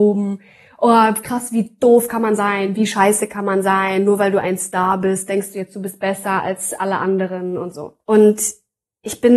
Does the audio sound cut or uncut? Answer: cut